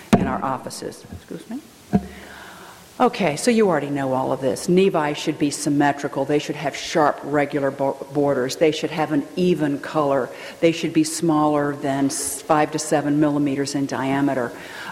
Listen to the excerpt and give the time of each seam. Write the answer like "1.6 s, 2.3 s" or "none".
none